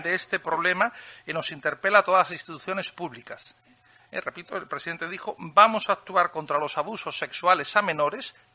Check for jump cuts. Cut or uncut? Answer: uncut